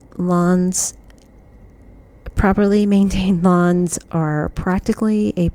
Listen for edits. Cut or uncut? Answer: uncut